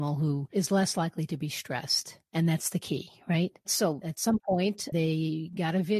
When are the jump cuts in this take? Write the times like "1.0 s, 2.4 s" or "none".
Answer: 4.9 s